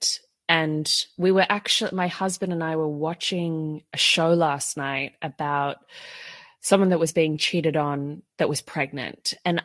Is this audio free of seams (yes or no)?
yes